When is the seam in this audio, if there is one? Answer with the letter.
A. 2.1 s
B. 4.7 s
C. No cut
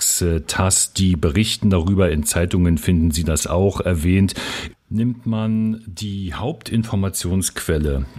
B